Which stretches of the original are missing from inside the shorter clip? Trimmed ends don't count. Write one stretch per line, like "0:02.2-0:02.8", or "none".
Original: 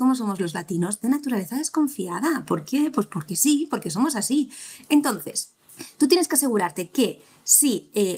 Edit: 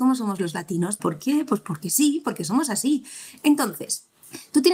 0:01.0-0:02.5